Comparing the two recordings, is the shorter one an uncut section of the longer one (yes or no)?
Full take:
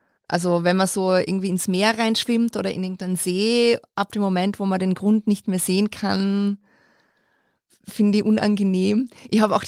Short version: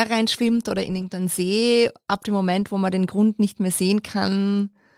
yes